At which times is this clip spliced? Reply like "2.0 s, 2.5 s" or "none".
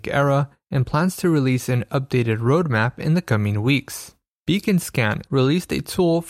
5.3 s